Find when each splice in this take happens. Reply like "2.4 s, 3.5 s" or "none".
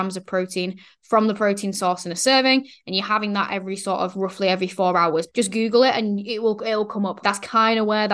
5.3 s, 7.2 s